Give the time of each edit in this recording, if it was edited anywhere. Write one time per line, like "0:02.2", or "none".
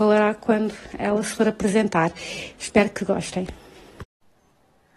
0:02.5